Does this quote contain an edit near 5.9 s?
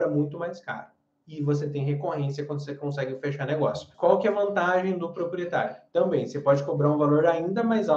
no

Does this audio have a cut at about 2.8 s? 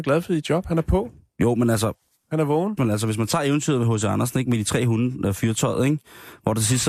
yes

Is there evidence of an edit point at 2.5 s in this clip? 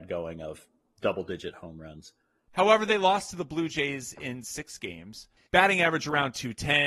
yes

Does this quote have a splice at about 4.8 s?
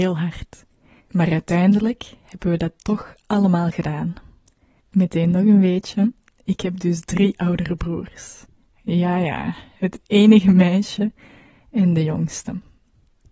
yes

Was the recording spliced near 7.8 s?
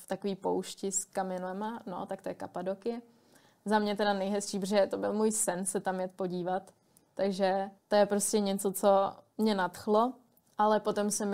yes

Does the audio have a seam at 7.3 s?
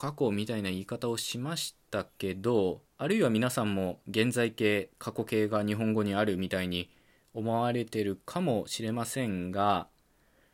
no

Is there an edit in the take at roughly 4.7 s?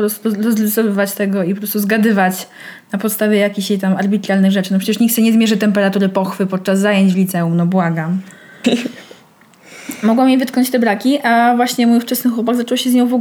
no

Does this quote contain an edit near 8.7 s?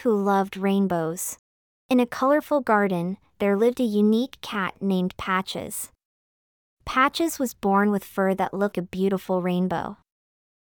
yes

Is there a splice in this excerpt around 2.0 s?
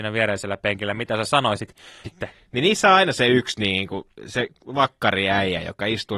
yes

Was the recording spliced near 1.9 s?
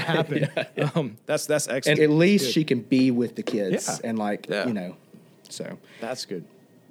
yes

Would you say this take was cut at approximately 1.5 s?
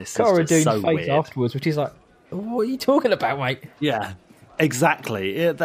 no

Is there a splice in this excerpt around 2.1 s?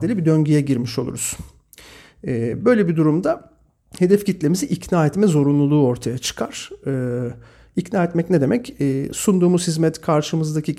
no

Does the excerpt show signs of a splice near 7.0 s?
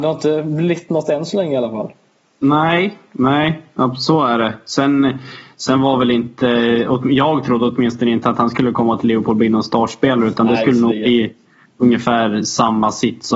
no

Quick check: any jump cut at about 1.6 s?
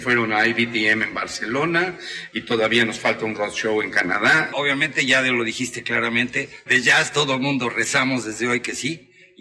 no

